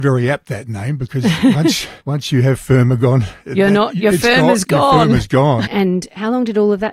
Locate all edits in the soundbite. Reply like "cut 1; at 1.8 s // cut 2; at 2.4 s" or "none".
cut 1; at 2.0 s // cut 2; at 5.7 s